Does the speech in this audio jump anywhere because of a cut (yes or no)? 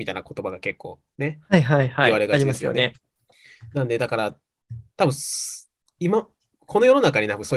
no